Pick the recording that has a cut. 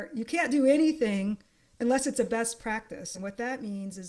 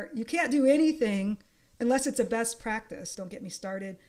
second; 1 cut; at 3.1 s

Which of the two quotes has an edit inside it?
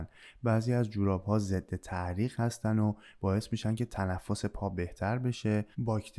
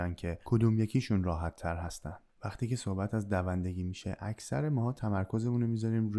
second; 1 cut; at 2.3 s

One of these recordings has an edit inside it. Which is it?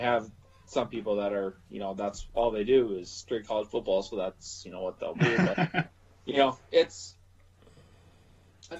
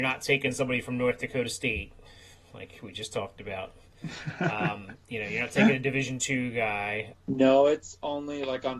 second; 1 cut; at 7.1 s

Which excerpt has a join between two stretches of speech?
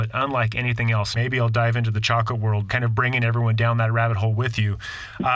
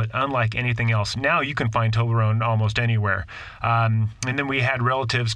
first; 2 cuts; at 1.1 s, 2.7 s

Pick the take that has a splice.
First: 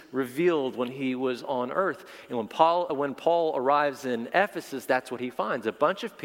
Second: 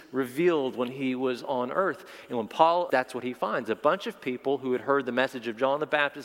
second; 1 cut; at 2.9 s

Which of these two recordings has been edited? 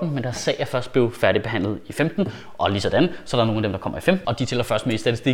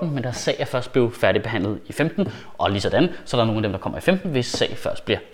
first; 1 cut; at 4.2 s

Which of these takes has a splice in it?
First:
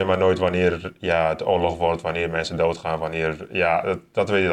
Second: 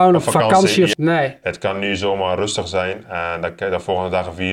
second; 1 cut; at 0.9 s

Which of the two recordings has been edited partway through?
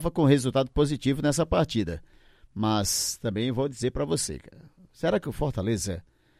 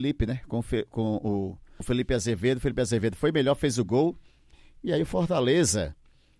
second; 1 cut; at 1.8 s

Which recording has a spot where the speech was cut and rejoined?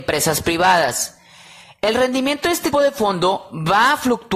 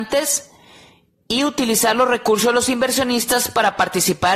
first; 1 cut; at 2.7 s

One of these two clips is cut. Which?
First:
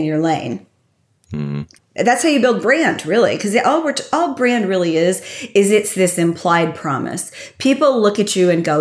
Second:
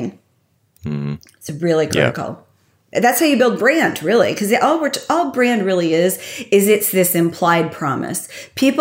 first; 1 cut; at 1.8 s

